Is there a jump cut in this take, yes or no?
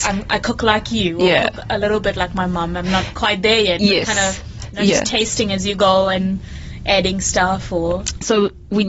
no